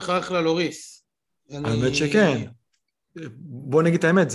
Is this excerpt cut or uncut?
uncut